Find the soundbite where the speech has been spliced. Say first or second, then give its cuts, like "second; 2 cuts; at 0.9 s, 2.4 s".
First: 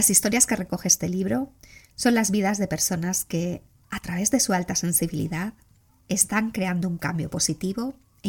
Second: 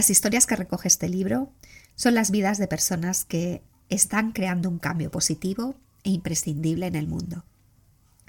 second; 1 cut; at 3.7 s